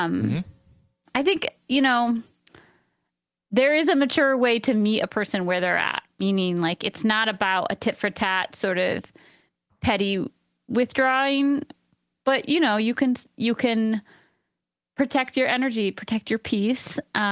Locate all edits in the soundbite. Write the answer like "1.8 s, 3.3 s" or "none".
none